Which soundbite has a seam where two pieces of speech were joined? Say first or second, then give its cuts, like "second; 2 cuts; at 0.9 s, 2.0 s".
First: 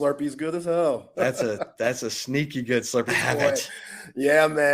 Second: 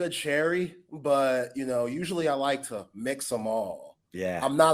first; 2 cuts; at 1.1 s, 3.1 s